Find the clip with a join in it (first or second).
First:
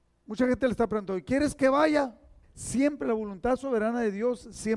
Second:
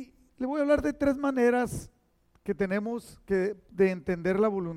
first